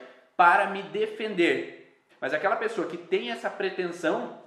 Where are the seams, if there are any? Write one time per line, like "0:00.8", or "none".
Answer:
0:02.1